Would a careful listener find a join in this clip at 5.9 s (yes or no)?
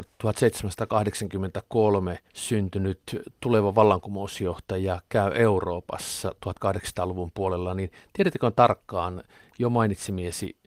no